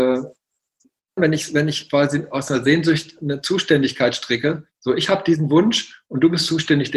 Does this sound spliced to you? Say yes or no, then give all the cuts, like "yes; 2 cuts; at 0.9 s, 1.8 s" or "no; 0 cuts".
yes; 1 cut; at 1.2 s